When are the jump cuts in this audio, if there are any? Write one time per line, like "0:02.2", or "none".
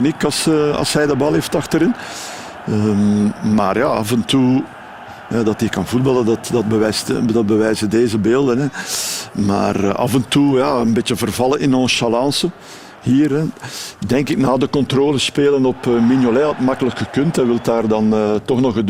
none